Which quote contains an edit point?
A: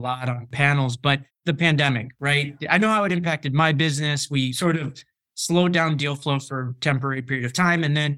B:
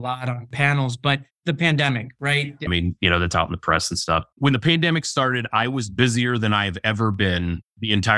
B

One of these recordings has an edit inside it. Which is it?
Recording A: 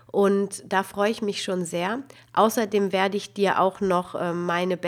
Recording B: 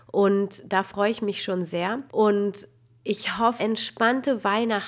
B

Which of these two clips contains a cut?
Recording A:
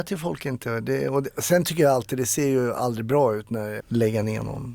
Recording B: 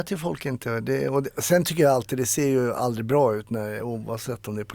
A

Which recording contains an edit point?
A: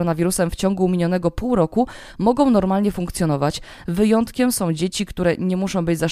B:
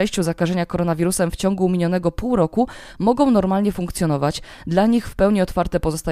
A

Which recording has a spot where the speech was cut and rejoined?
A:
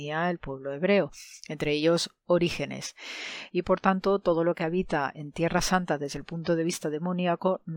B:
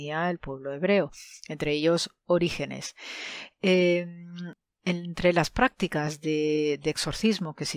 A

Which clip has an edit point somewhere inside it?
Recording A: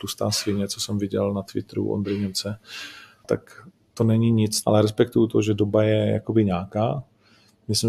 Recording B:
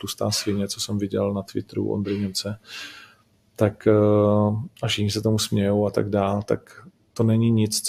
A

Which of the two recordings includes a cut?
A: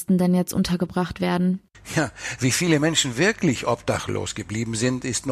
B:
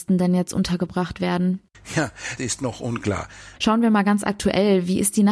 B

